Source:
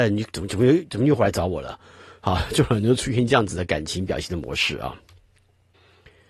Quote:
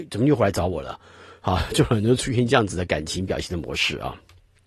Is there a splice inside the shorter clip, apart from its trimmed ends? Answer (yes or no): no